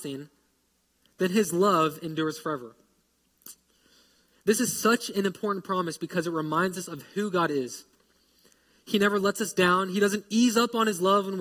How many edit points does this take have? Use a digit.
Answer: 0